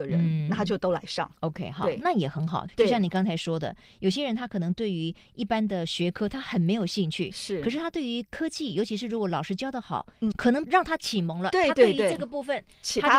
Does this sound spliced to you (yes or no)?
yes